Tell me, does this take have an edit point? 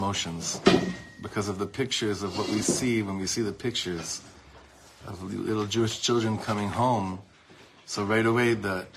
no; 0 cuts

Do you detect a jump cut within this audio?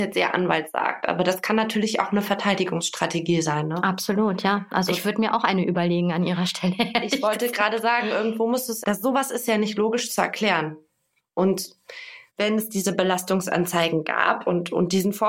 yes; 3 cuts; at 4.9 s, 8.8 s, 12.3 s

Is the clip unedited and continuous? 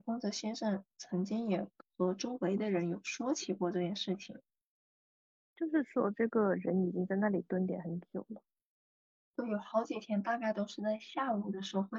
yes; 0 cuts

